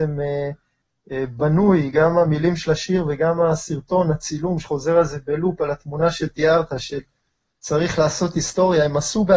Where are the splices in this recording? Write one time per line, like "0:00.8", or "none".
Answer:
none